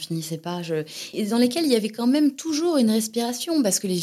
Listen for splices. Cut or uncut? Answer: cut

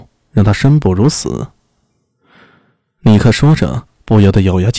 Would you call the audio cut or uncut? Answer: uncut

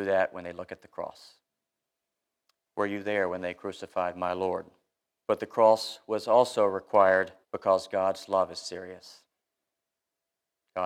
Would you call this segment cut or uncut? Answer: cut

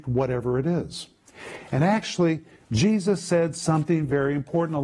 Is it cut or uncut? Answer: uncut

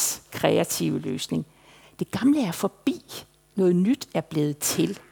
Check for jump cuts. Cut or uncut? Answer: cut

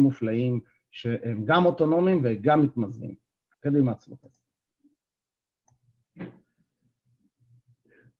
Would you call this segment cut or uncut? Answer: uncut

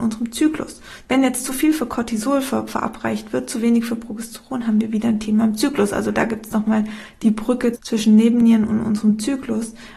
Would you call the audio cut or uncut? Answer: cut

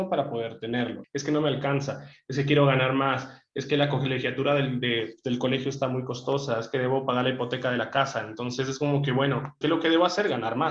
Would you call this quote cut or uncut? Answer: cut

